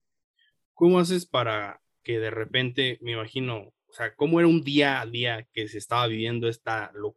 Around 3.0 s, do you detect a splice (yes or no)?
no